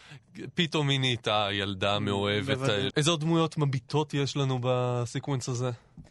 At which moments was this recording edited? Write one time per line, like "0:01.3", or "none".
0:02.9